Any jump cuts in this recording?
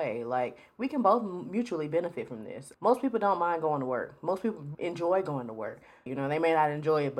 yes; 3 cuts; at 2.7 s, 4.7 s, 6.1 s

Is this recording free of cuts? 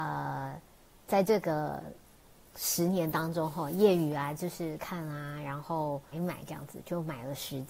no; 2 cuts; at 4.8 s, 6.1 s

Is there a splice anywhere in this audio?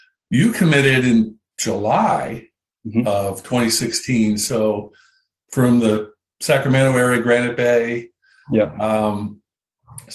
no; 0 cuts

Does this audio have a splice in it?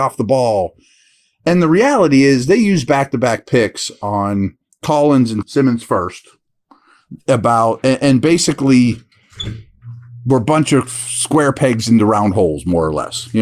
yes; 1 cut; at 5.4 s

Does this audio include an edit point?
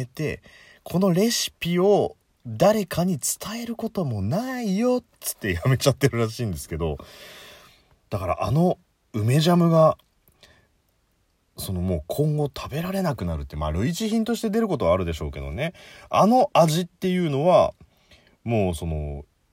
no; 0 cuts

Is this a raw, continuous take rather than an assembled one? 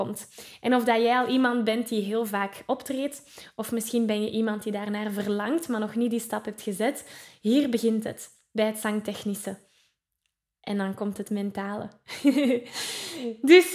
yes; 0 cuts

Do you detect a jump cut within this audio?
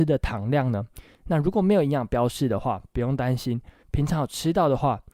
yes; 2 cuts; at 1.2 s, 3.8 s

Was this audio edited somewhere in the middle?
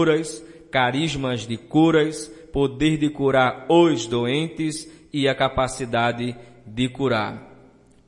no; 0 cuts

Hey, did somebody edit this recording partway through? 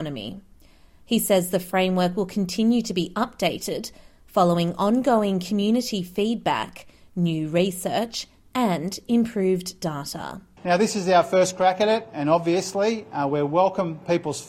no; 0 cuts

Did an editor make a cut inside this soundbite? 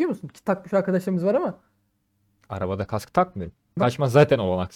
yes; 1 cut; at 3.8 s

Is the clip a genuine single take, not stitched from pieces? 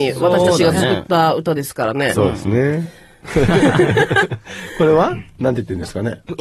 no; 1 cut; at 3.2 s

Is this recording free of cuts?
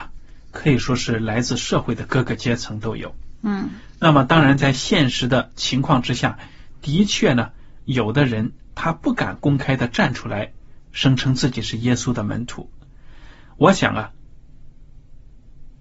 yes; 0 cuts

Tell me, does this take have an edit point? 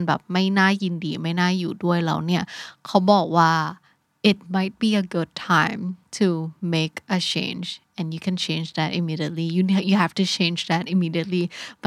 no; 0 cuts

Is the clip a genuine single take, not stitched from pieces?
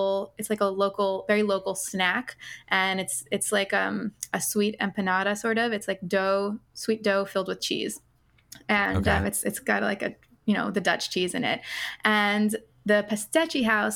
yes; 0 cuts

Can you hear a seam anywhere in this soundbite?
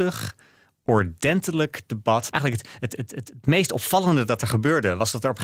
yes; 1 cut; at 2.3 s

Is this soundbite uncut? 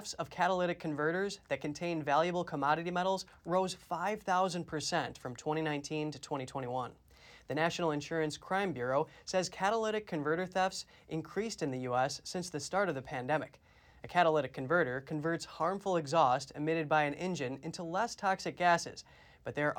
yes; 0 cuts

